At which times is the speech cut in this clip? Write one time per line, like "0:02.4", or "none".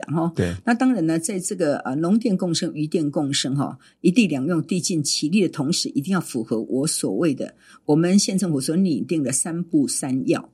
none